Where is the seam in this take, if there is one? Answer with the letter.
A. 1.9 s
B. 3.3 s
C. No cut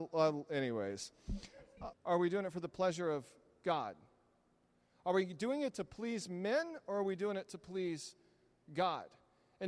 A